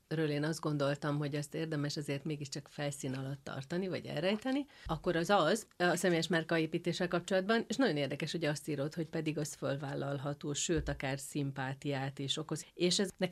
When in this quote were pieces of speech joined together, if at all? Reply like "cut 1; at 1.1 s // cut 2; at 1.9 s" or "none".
cut 1; at 7.7 s